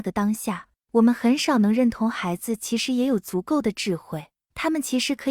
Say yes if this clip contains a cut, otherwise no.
no